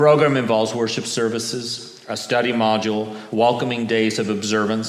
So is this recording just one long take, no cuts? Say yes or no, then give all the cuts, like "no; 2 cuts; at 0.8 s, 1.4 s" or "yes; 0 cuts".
yes; 0 cuts